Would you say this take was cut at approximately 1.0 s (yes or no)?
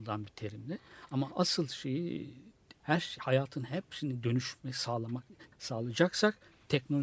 no